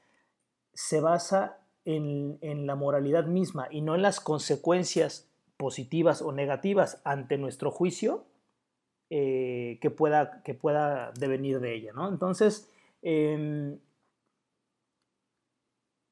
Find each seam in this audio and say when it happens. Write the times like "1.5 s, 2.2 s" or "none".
none

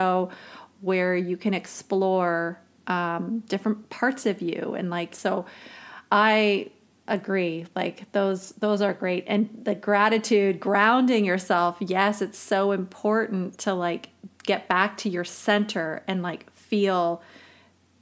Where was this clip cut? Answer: 5.1 s

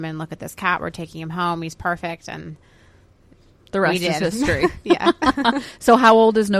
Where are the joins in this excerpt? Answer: none

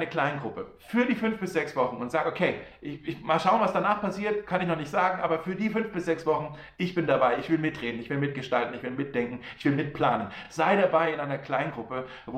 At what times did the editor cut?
none

